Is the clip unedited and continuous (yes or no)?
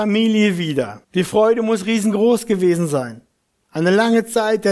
no